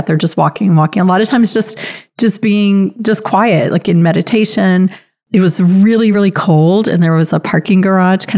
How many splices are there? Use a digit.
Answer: 0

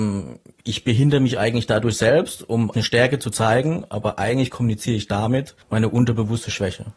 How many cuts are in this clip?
2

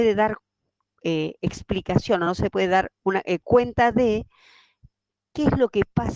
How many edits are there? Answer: 0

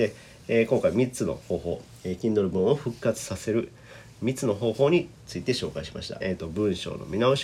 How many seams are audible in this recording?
1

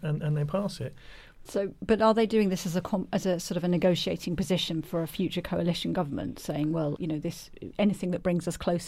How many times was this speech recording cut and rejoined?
2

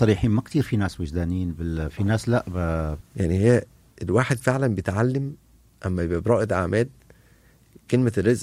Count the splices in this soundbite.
2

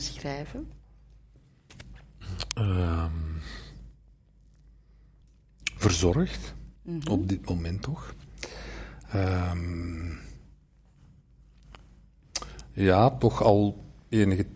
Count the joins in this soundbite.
1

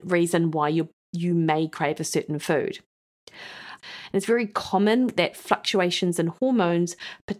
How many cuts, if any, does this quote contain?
1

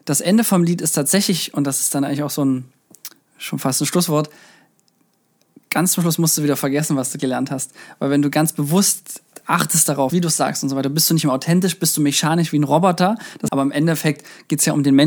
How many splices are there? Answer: 2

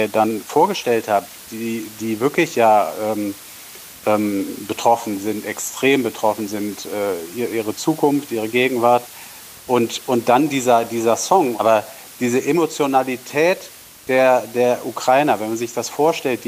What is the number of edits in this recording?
1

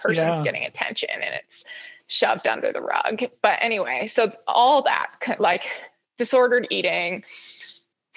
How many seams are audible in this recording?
0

